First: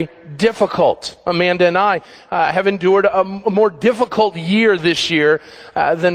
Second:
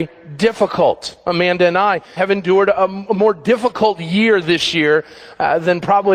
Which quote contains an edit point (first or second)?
second